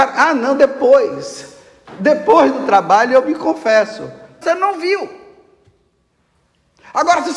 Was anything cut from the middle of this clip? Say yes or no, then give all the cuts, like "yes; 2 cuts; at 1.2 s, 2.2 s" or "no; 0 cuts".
yes; 1 cut; at 4.4 s